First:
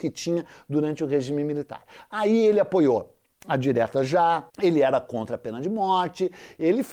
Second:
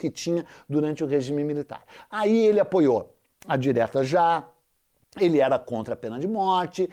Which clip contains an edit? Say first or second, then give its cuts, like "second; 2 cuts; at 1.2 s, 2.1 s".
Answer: first; 1 cut; at 4.5 s